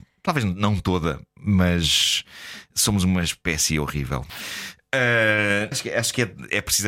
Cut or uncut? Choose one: cut